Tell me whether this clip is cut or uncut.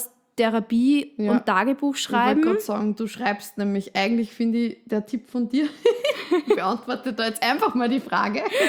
uncut